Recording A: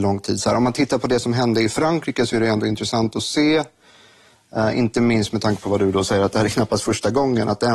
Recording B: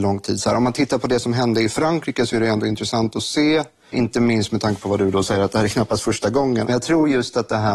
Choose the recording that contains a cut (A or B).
B